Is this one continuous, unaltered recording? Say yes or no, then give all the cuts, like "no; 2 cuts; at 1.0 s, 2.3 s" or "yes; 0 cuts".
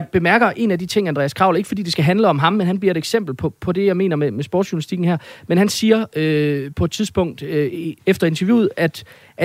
no; 1 cut; at 8.0 s